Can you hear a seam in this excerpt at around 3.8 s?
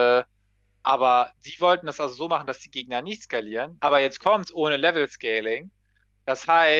yes; 1 cut; at 3.8 s

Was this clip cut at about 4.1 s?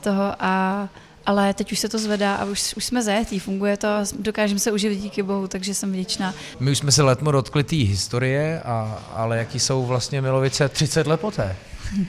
no; 1 cut; at 6.5 s

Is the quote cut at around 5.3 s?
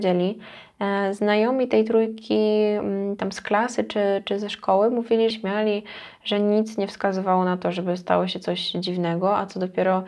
yes; 1 cut; at 5.3 s

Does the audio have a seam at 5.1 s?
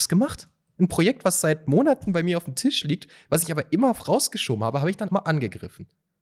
yes; 1 cut; at 5.1 s

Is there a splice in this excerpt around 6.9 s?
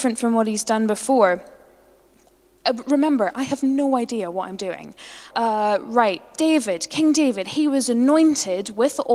no; 1 cut; at 5.3 s

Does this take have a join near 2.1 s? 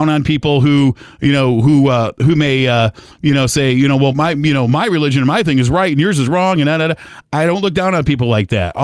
no; 1 cut; at 4.1 s

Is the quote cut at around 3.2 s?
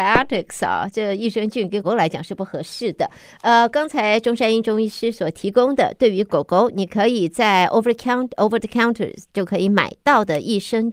no; 1 cut; at 1.8 s

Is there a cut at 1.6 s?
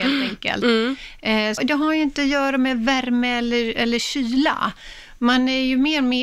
yes; 1 cut; at 1.6 s

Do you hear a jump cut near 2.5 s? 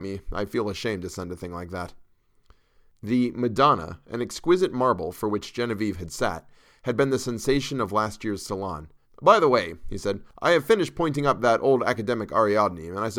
no; 1 cut; at 9.0 s

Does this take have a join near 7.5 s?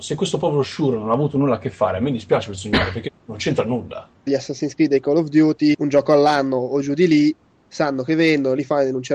no; 2 cuts; at 4.3 s, 5.7 s

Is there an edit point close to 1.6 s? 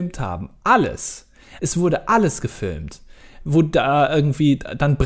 yes; 1 cut; at 1.6 s

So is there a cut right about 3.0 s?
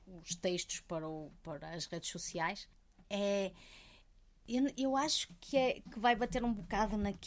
yes; 1 cut; at 3.0 s

